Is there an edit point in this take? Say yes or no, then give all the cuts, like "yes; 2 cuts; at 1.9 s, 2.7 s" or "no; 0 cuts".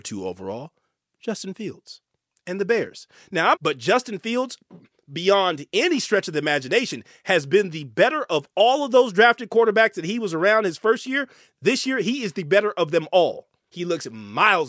yes; 2 cuts; at 3.5 s, 13.7 s